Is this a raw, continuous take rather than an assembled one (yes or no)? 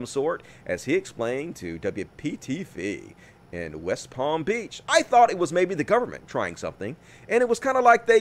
yes